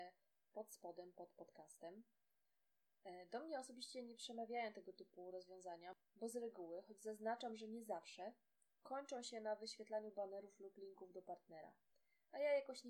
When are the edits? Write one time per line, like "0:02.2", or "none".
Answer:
none